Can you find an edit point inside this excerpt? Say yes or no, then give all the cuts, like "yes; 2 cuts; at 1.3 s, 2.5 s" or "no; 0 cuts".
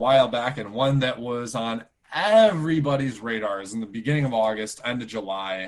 no; 0 cuts